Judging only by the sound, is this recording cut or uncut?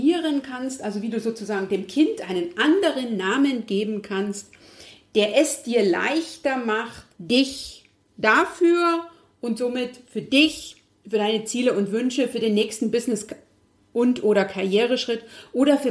cut